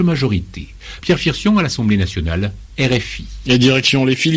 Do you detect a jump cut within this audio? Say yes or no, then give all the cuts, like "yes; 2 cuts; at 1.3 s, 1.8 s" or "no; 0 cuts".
no; 0 cuts